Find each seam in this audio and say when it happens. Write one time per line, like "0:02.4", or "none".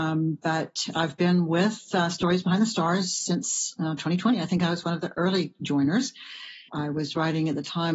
0:06.7